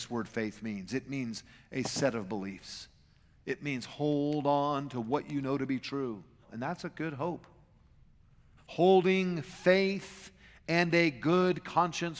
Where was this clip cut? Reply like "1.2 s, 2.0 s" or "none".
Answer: 6.4 s, 8.6 s